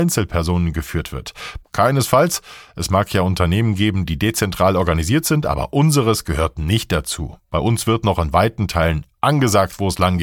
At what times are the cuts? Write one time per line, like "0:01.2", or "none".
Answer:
0:01.6